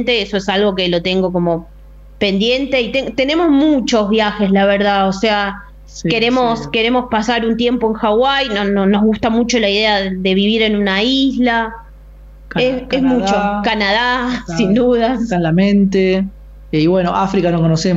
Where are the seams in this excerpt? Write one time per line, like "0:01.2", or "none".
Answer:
none